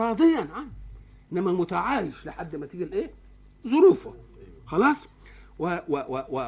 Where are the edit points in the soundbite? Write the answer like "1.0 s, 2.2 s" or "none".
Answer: none